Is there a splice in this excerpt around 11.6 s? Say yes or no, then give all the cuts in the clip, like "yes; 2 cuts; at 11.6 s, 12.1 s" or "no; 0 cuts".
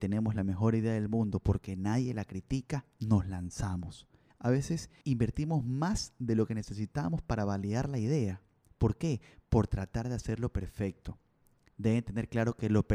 no; 1 cut; at 4.3 s